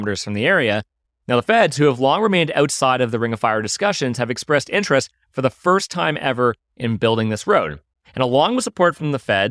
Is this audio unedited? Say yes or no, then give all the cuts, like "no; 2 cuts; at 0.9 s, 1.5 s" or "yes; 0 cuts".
no; 1 cut; at 1.1 s